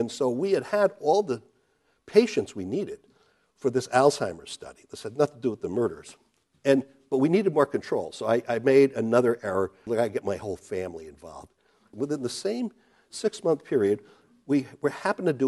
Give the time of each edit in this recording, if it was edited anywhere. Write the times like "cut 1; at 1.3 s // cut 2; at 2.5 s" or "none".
cut 1; at 9.9 s // cut 2; at 11.9 s

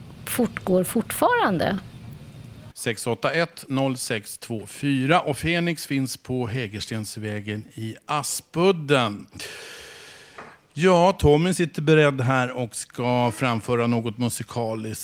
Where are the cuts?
cut 1; at 2.7 s

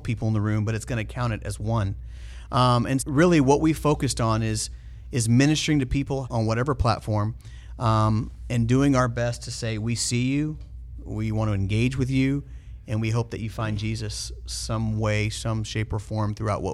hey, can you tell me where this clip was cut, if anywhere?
cut 1; at 3.0 s // cut 2; at 6.2 s

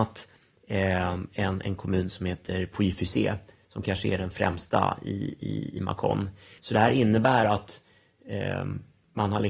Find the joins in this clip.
cut 1; at 6.6 s

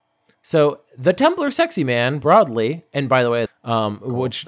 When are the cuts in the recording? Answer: cut 1; at 3.5 s

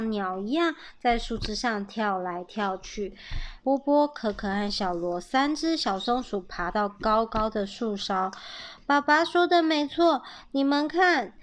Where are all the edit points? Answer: cut 1; at 3.6 s

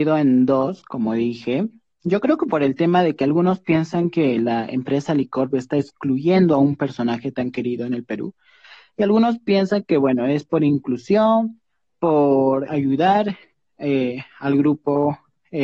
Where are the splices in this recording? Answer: cut 1; at 12.7 s

